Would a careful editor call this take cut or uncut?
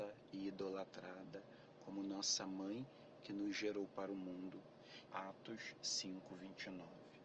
cut